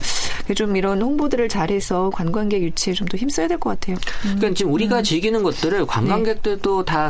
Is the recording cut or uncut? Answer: uncut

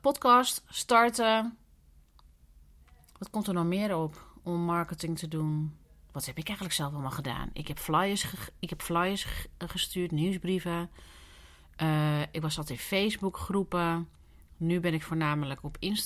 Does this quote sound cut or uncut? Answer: uncut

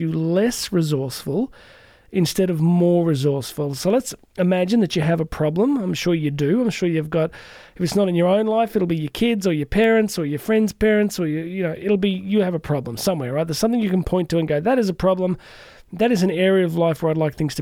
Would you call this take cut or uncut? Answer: uncut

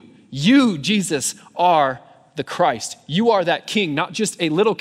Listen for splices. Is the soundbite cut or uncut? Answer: uncut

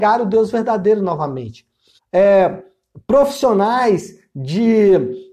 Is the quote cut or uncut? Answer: cut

